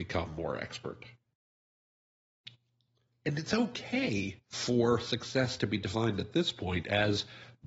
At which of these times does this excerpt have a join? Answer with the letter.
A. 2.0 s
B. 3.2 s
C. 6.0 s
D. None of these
B